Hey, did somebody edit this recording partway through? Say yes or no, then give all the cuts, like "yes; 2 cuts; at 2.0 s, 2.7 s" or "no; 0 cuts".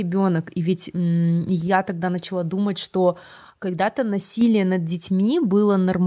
no; 0 cuts